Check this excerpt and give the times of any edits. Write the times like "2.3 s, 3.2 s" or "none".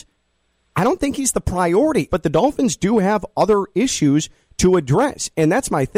2.1 s